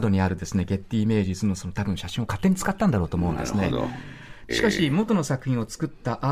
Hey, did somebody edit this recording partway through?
yes; 1 cut; at 4.5 s

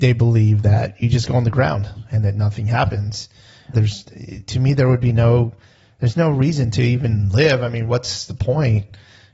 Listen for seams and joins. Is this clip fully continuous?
no; 1 cut; at 3.7 s

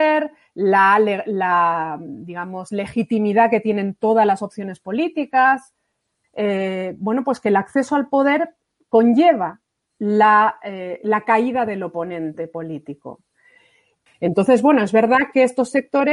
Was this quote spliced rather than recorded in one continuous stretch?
yes; 2 cuts; at 6.2 s, 14.1 s

